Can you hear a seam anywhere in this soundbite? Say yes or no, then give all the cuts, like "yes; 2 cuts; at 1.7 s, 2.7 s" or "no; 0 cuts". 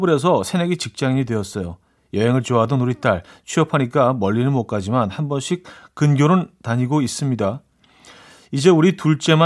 no; 0 cuts